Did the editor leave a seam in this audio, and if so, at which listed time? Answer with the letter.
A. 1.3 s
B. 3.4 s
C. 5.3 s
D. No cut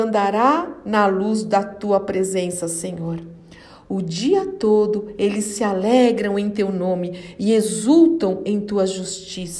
D